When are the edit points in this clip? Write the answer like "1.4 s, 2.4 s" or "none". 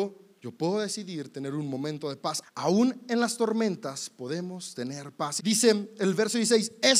2.4 s, 5.4 s